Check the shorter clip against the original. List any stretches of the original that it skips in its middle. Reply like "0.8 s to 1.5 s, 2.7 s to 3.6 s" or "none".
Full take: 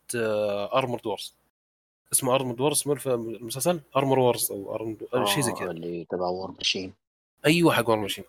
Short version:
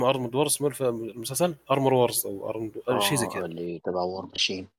none